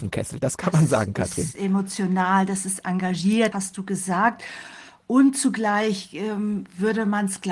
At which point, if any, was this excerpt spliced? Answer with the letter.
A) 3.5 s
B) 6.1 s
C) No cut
A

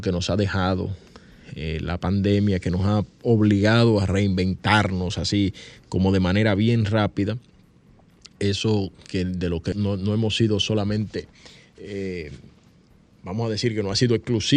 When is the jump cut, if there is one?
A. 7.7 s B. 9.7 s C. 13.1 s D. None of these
B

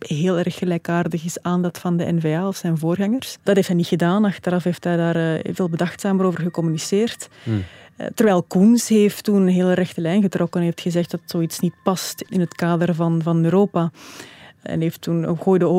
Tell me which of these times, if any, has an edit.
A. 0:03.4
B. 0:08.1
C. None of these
A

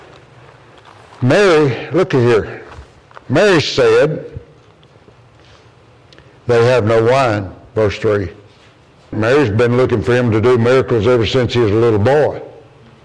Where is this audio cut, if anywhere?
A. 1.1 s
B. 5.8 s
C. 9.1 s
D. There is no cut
C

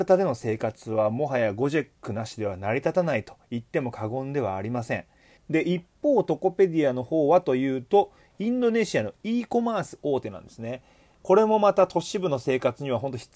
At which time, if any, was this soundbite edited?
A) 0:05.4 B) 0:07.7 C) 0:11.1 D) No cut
A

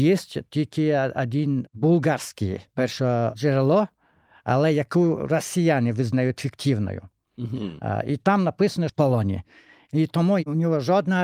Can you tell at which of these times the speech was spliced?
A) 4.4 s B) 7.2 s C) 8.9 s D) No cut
C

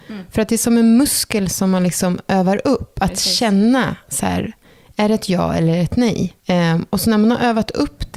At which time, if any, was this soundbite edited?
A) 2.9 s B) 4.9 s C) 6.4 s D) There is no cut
C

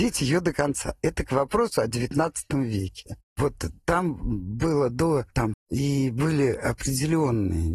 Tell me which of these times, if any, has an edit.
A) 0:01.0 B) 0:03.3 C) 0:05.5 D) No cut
C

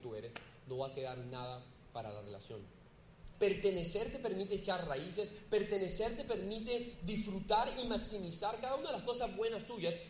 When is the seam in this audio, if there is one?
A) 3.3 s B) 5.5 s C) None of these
A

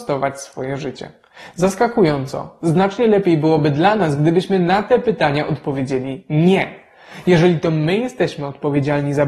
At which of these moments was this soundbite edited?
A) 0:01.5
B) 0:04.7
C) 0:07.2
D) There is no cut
D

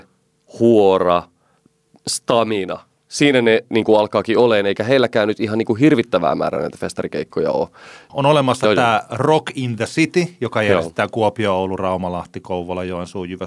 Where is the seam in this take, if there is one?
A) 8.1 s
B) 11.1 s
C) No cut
A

